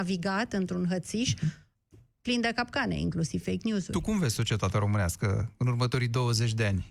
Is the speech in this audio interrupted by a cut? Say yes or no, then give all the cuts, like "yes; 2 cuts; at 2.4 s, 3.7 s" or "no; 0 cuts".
no; 0 cuts